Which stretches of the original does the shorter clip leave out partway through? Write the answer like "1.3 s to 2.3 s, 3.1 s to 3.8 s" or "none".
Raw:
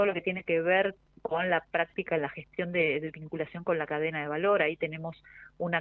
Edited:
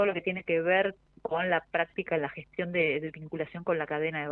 none